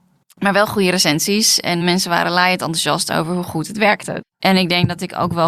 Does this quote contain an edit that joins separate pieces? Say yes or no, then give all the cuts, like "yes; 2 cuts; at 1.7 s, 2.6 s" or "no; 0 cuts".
yes; 2 cuts; at 1.8 s, 4.2 s